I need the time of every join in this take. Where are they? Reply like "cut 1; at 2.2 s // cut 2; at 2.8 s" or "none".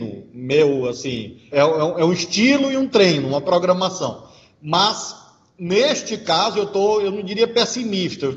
cut 1; at 1.5 s